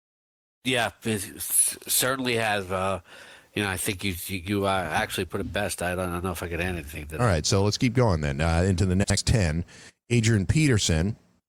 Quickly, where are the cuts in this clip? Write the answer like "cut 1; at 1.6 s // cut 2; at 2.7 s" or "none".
none